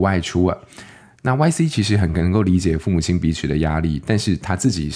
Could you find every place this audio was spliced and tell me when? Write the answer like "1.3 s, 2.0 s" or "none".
1.2 s